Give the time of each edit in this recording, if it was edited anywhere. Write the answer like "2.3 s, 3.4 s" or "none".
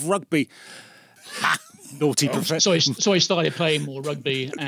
1.2 s